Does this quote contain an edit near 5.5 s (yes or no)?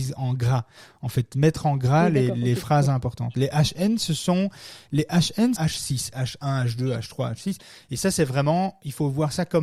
yes